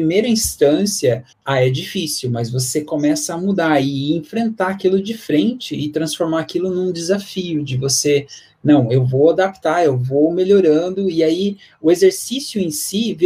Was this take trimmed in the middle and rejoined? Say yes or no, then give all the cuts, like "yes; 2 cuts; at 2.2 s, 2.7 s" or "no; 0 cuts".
yes; 1 cut; at 1.3 s